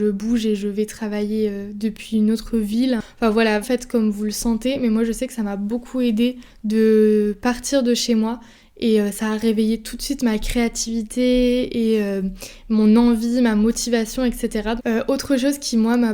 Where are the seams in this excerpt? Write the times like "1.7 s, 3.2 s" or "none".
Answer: 3.6 s, 14.8 s